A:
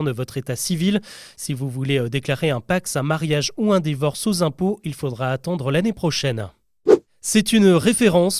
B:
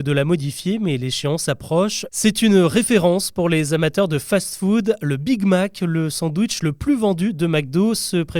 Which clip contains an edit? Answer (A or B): B